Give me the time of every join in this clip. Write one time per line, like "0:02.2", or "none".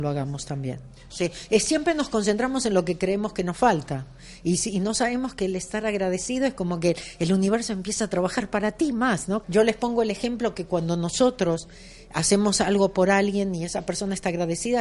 0:01.1
0:09.4